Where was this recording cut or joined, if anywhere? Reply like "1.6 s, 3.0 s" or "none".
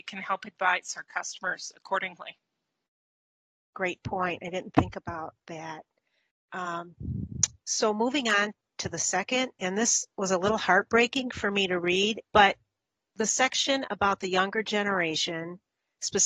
none